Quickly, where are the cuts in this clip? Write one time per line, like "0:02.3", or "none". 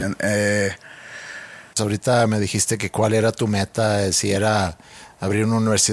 0:01.7

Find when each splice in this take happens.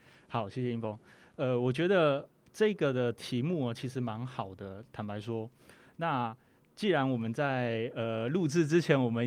none

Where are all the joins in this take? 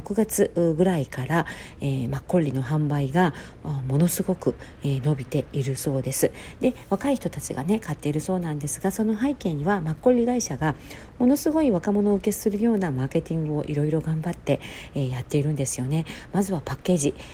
none

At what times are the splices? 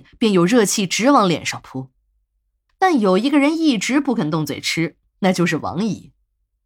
0:02.7

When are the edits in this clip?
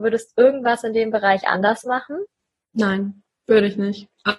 none

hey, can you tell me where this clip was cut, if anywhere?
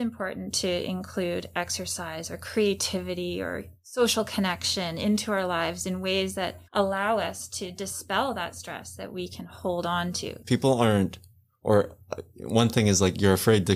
0:06.7
0:10.4

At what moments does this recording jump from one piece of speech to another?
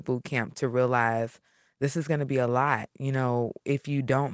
none

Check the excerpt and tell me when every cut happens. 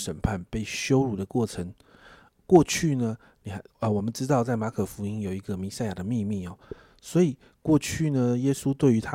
none

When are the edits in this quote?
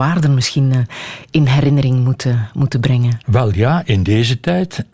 0:03.2

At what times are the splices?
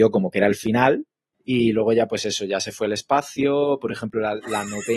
0:01.3

